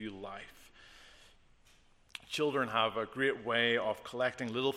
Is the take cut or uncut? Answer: uncut